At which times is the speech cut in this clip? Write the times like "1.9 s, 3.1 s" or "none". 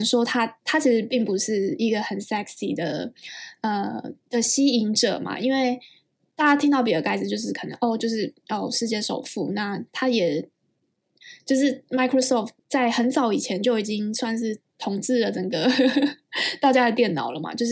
4.2 s, 12.6 s